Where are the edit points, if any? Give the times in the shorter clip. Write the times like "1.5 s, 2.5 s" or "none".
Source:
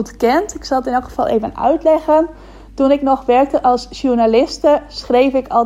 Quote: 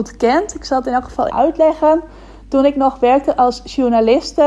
1.3 s